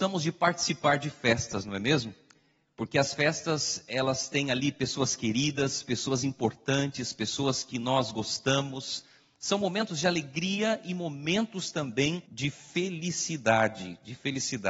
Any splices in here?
yes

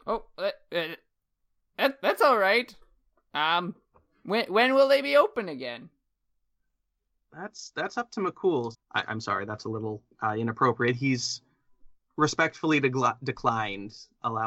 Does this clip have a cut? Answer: yes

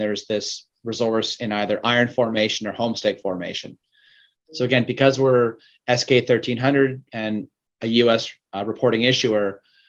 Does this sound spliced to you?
yes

